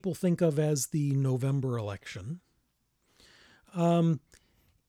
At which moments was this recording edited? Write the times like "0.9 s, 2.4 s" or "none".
none